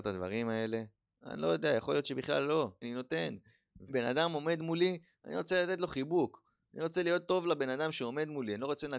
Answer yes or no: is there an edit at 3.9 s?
yes